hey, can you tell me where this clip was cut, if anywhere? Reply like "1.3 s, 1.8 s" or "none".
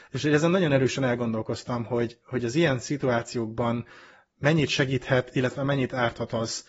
none